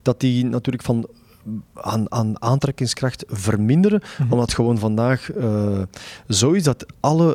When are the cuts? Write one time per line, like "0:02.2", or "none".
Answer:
none